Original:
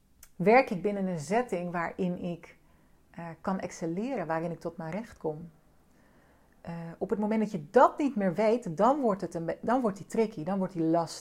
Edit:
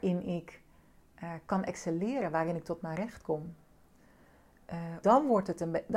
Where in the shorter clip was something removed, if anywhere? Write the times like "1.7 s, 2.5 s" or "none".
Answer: 5.0 s